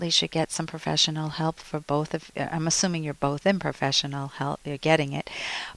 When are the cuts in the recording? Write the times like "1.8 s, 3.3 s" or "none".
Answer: none